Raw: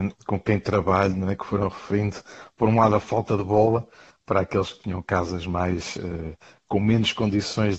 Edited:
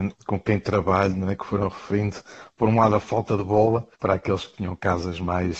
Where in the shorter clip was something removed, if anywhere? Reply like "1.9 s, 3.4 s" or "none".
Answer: 3.9 s